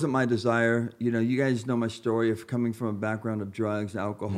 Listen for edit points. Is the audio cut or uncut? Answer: uncut